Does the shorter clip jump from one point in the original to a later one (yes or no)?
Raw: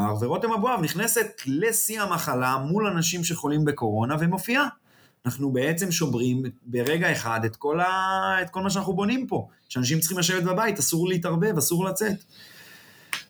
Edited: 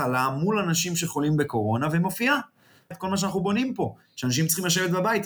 yes